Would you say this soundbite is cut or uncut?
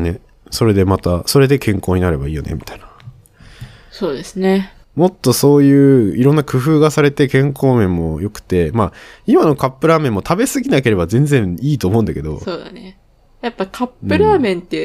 cut